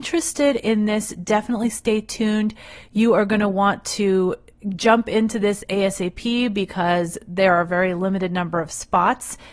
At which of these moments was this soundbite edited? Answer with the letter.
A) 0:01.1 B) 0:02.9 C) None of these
C